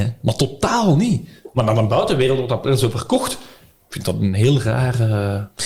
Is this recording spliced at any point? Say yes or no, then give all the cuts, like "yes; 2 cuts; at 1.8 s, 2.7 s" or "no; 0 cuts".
no; 0 cuts